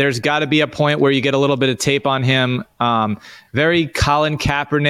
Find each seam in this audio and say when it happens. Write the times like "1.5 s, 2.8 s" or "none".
none

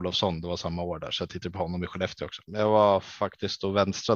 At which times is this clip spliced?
2.5 s

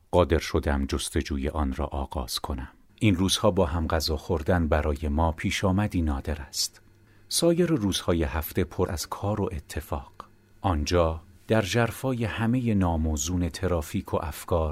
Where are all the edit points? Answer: 2.9 s, 8.9 s, 10.5 s

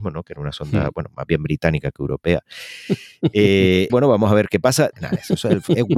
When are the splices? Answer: 3.9 s, 4.9 s

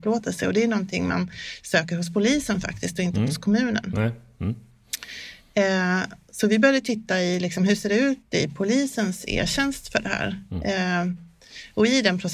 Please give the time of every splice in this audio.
none

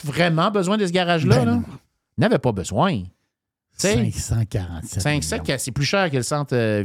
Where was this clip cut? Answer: none

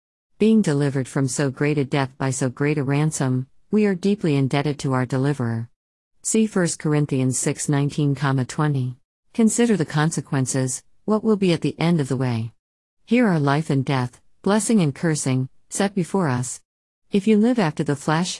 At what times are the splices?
9.1 s

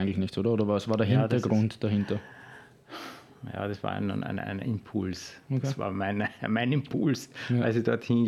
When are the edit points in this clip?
none

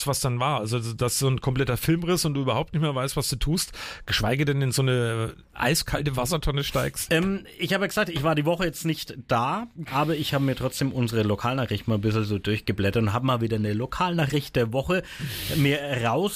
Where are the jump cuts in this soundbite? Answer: 7.1 s, 9.9 s

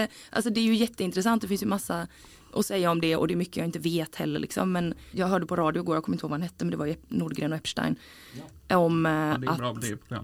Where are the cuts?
5.1 s

